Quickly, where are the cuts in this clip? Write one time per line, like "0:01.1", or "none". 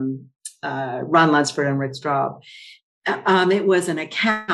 none